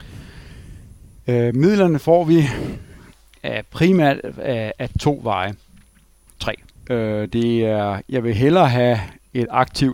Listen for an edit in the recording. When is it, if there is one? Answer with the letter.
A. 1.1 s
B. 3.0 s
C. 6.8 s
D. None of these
C